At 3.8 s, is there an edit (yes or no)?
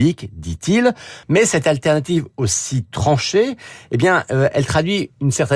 no